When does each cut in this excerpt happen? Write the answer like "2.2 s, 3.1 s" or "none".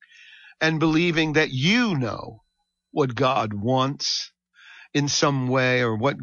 none